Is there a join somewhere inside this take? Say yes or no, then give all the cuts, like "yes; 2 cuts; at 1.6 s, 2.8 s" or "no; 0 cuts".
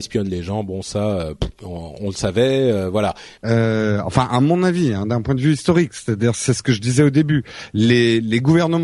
yes; 1 cut; at 3.4 s